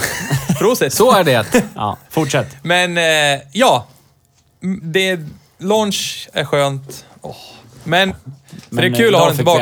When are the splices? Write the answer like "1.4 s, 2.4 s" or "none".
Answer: 4.8 s, 8.1 s